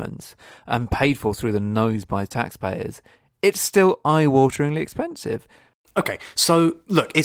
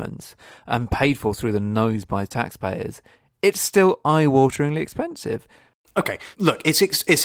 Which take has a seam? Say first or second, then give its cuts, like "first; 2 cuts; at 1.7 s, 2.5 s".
second; 1 cut; at 6.3 s